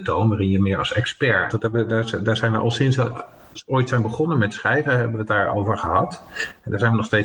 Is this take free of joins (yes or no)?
no